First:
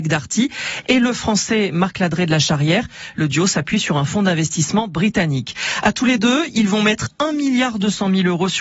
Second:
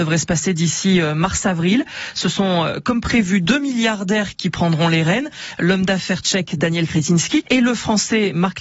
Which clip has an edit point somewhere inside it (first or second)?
second